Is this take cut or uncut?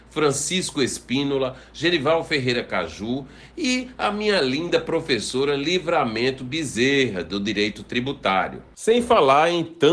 uncut